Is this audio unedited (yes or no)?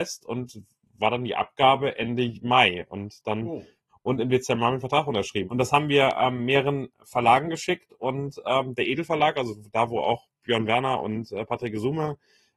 no